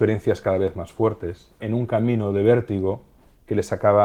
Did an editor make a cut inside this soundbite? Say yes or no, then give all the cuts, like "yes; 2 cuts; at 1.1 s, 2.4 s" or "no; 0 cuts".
yes; 1 cut; at 1.6 s